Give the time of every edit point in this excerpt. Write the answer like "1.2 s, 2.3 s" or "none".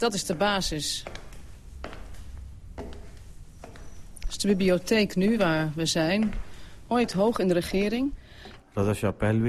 6.9 s, 8.6 s